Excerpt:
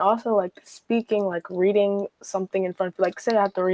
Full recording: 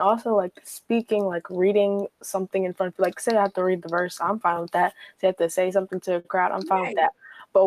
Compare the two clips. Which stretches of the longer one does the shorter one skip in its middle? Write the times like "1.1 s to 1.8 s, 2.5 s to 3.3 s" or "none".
none